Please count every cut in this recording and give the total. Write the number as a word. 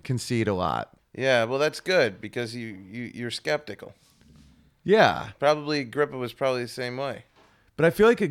one